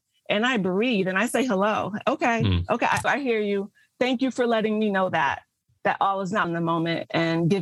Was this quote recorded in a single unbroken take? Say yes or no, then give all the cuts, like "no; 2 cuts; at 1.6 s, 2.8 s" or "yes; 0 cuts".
no; 2 cuts; at 3.0 s, 6.4 s